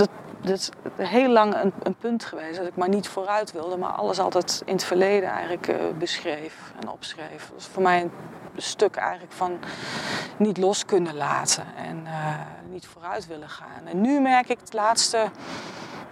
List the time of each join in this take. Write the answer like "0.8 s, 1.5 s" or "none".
12.6 s

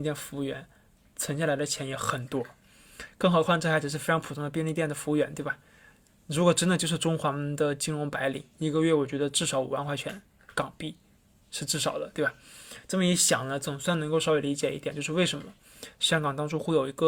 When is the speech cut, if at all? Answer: none

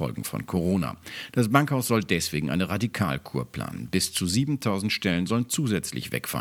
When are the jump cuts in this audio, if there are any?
none

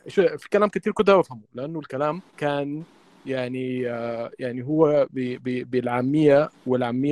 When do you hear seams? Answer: 2.3 s

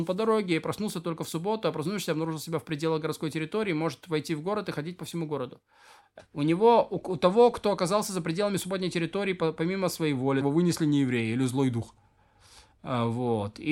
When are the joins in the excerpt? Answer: 6.2 s, 10.4 s

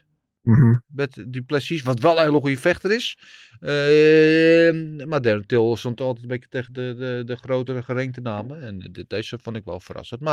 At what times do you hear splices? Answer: none

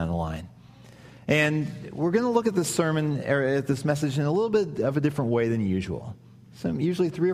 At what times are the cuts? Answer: none

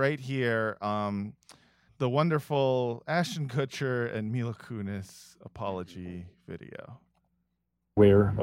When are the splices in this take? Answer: 1.9 s

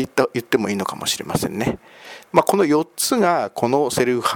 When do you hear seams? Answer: 2.3 s

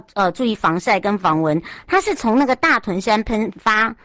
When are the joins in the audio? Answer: 1.8 s

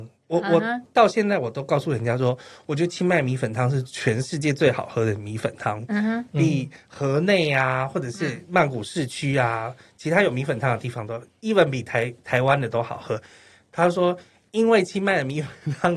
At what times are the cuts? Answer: none

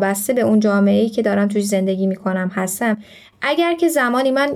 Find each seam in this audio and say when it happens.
none

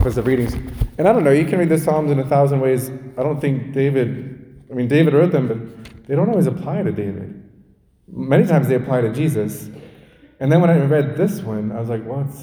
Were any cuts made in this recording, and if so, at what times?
5.5 s

